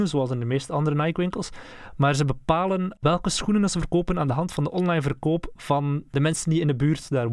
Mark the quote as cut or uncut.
uncut